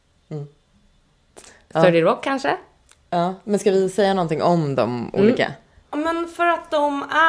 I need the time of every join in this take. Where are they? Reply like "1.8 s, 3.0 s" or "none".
5.8 s